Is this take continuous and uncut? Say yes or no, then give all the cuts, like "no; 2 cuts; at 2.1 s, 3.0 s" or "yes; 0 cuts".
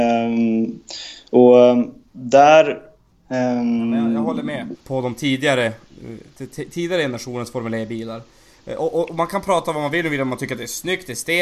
no; 1 cut; at 4.7 s